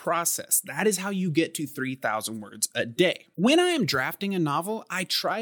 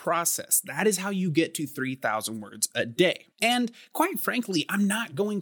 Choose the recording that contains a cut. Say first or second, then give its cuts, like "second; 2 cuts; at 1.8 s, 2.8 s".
second; 1 cut; at 3.3 s